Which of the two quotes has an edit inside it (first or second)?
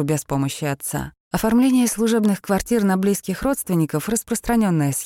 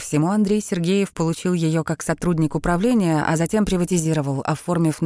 first